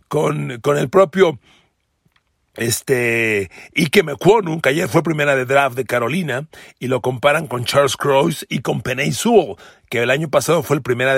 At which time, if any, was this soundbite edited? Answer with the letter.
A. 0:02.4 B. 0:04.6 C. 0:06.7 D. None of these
D